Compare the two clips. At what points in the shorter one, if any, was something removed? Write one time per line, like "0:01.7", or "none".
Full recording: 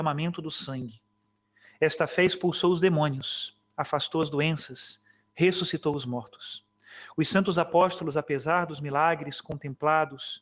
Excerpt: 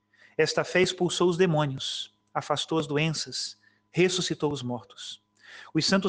none